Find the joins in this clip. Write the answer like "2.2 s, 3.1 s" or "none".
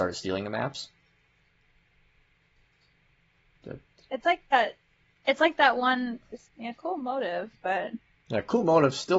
6.5 s